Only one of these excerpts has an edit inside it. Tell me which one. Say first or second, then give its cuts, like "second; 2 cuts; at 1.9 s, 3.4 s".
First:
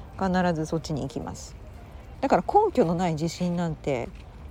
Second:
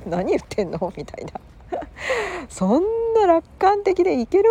first; 1 cut; at 2.1 s